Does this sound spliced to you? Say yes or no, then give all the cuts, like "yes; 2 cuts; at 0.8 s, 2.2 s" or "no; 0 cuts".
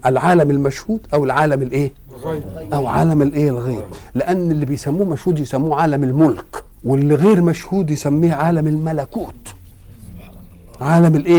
yes; 1 cut; at 6.7 s